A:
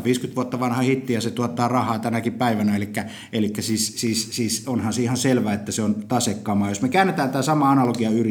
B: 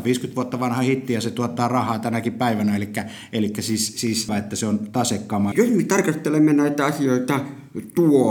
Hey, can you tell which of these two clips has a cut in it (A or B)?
B